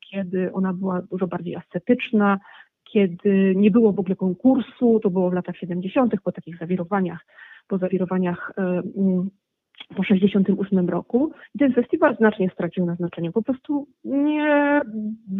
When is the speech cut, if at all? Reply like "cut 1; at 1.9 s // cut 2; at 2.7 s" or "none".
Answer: cut 1; at 11.4 s